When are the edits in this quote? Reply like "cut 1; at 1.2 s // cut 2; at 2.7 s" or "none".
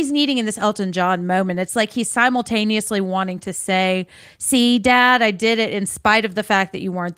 none